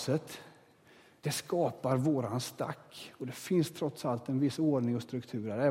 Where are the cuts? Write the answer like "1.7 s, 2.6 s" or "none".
1.2 s